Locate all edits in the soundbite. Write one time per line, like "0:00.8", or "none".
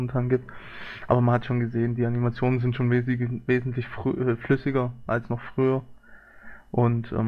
none